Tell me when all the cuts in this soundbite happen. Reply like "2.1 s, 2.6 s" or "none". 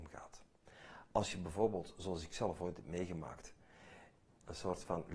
4.2 s